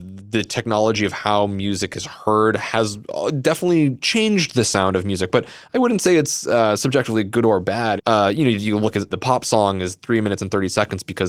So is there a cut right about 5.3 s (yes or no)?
no